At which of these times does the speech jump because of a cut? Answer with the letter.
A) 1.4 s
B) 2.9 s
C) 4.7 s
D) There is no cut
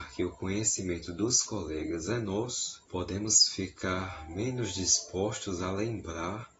B